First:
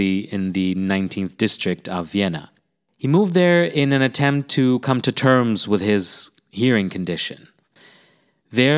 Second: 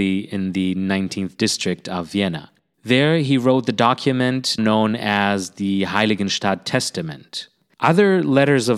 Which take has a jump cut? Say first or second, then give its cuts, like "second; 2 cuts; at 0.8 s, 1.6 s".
second; 3 cuts; at 2.7 s, 4.6 s, 7.7 s